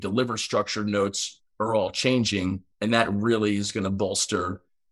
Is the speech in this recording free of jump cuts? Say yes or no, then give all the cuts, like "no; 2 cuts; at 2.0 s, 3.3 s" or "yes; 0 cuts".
no; 1 cut; at 2.7 s